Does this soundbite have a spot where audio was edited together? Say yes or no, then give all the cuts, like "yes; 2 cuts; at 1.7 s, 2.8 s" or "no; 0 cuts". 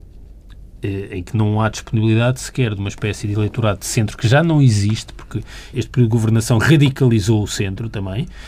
yes; 1 cut; at 5.7 s